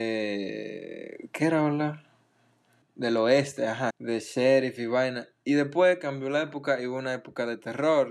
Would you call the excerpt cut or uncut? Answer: cut